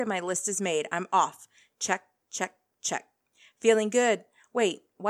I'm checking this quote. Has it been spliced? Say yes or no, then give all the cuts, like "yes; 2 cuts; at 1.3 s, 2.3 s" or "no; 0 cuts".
no; 0 cuts